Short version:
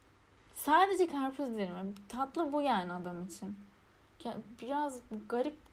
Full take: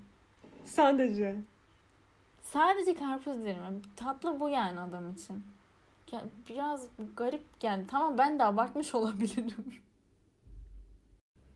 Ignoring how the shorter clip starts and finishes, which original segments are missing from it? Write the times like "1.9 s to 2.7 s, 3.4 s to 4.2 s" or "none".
none